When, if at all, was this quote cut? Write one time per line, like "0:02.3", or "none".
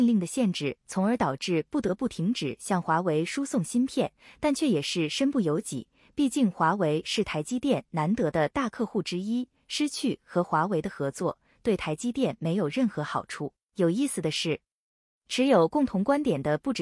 0:13.7